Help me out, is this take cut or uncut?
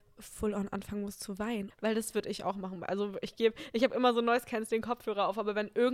cut